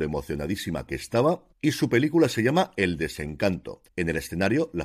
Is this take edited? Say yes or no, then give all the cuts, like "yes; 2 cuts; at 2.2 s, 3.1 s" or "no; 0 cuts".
yes; 1 cut; at 3.9 s